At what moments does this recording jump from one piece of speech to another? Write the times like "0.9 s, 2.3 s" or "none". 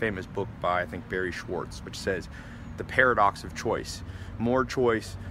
none